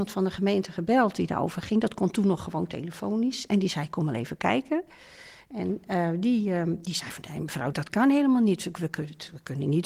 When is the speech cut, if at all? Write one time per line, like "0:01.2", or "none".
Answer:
0:07.7